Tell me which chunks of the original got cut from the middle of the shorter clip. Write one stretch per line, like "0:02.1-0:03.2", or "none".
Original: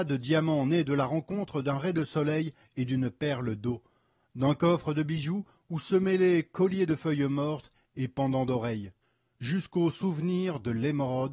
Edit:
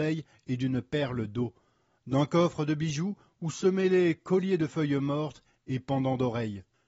none